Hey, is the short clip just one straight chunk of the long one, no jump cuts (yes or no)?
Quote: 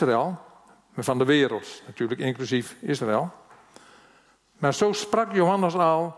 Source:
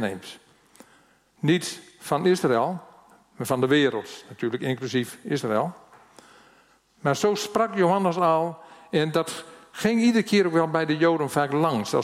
yes